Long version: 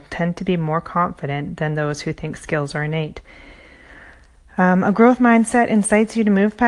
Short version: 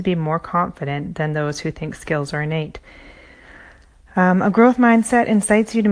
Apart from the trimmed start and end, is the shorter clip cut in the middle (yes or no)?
no